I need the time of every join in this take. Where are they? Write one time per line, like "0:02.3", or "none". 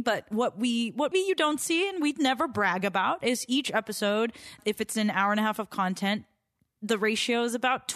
0:01.1